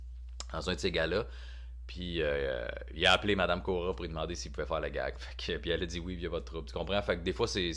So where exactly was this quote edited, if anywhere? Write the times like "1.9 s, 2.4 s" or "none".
none